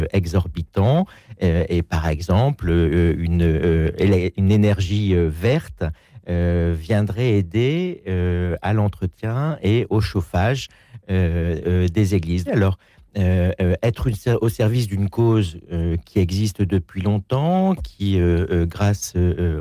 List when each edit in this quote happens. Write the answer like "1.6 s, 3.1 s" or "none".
12.5 s